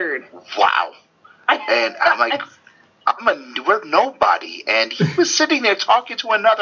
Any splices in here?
no; 0 cuts

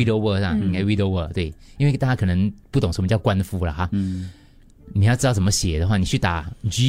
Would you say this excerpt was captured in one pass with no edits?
yes; 0 cuts

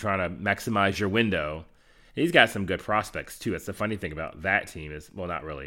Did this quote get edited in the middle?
no; 0 cuts

